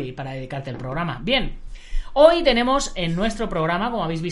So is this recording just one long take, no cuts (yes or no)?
yes